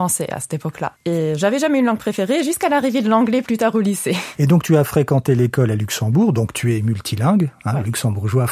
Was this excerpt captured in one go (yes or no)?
no